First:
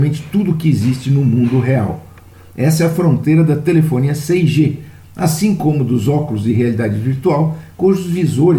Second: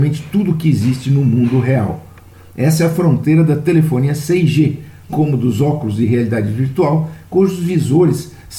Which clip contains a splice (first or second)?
second